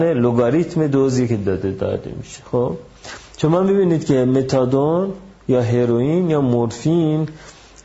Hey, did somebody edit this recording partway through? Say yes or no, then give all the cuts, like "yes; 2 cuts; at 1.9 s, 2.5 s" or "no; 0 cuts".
no; 0 cuts